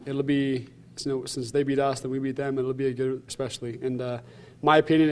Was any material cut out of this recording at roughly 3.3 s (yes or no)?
yes